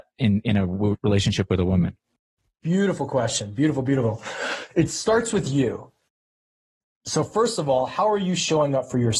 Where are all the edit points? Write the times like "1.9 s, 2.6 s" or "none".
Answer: none